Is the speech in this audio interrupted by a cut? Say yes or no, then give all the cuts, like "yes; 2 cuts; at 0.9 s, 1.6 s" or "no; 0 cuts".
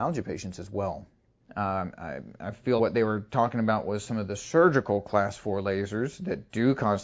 yes; 2 cuts; at 1.4 s, 2.8 s